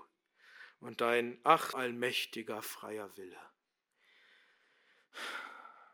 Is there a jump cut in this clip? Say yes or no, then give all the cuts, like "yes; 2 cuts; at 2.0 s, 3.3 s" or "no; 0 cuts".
yes; 1 cut; at 1.7 s